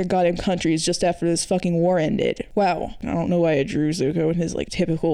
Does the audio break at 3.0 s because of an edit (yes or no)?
yes